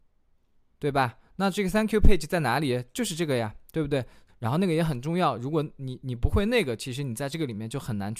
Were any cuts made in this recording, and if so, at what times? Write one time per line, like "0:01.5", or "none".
0:04.3